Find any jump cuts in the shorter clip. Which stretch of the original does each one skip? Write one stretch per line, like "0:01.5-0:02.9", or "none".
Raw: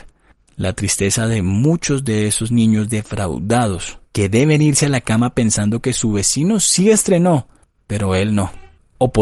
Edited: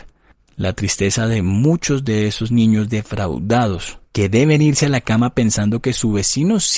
none